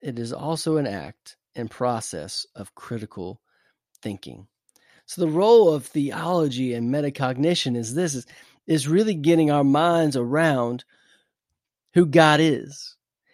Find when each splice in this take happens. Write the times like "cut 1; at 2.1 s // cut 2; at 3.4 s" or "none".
none